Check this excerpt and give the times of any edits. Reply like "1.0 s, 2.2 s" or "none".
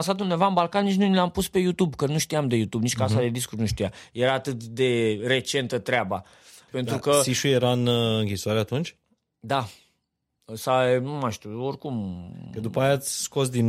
6.7 s